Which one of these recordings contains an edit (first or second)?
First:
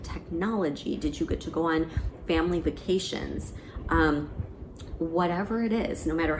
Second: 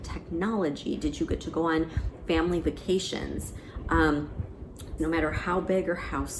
second